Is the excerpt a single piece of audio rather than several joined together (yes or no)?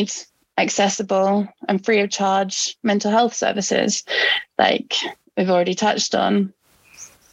yes